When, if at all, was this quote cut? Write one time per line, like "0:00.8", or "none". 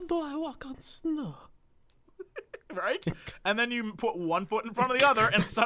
none